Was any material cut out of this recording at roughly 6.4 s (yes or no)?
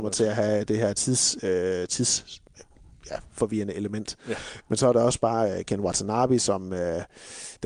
no